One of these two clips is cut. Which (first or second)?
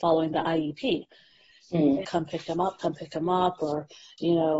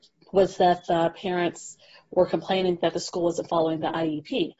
first